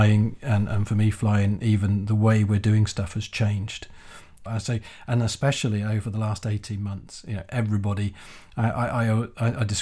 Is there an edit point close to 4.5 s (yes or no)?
yes